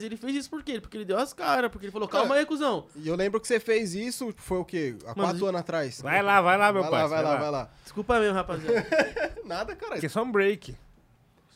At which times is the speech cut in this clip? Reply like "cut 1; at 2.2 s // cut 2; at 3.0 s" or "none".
cut 1; at 4.3 s // cut 2; at 6.0 s // cut 3; at 10.0 s